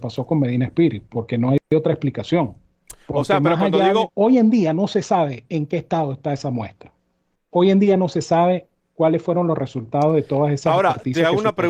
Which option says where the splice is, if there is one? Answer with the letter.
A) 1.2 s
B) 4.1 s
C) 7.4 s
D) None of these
B